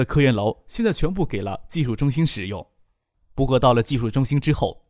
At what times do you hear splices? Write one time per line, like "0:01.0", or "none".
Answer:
0:03.1